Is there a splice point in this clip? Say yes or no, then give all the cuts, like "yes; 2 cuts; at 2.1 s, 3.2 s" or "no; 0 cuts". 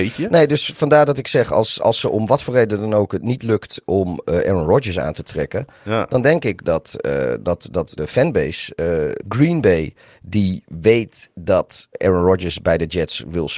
yes; 3 cuts; at 8.0 s, 9.2 s, 11.9 s